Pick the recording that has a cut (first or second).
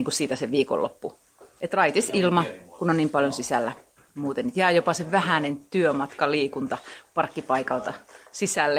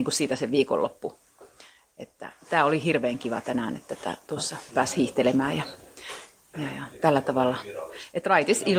first